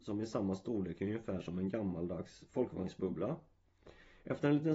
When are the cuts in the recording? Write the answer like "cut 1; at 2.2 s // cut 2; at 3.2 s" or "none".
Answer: none